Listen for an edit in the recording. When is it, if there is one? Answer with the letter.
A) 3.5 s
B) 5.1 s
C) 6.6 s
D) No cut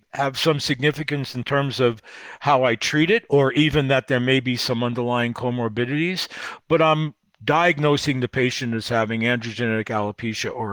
D